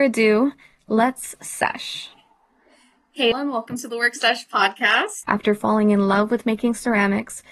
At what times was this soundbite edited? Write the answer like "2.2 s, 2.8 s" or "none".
3.3 s, 5.2 s